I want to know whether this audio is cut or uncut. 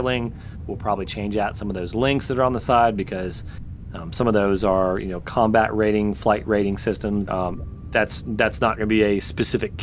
cut